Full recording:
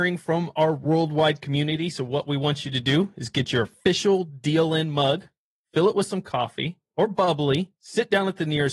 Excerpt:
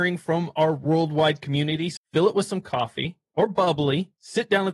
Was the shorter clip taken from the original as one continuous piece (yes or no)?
no